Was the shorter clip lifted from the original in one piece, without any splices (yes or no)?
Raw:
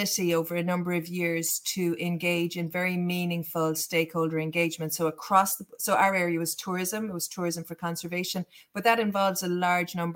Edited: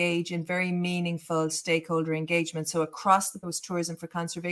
no